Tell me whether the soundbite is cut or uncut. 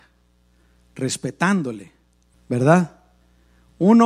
cut